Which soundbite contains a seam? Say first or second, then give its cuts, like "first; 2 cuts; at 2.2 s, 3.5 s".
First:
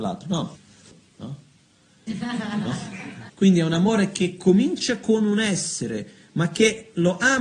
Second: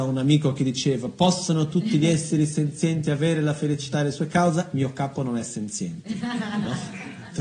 first; 2 cuts; at 2.1 s, 3.3 s